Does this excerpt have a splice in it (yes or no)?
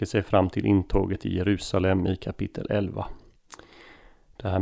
no